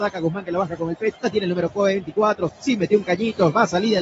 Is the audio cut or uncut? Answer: cut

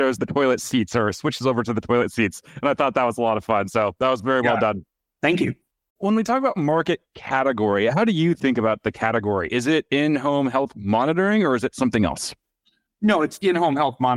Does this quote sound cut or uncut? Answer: cut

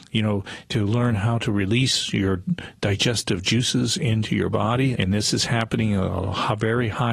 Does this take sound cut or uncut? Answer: cut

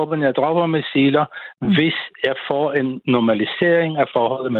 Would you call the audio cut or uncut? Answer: uncut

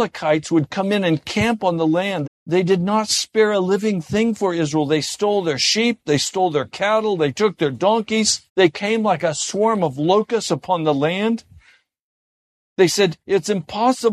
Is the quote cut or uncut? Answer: cut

